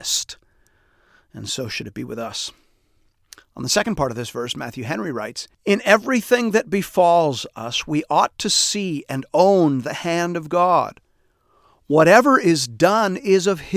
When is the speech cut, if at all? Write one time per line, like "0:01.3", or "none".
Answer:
0:05.5